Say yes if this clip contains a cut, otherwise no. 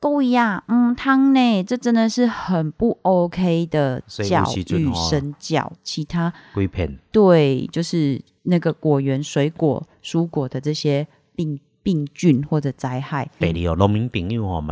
yes